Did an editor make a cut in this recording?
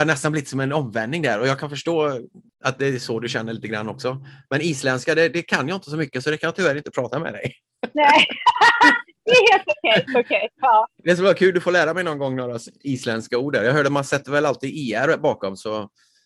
yes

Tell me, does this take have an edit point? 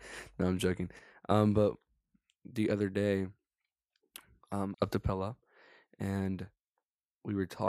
yes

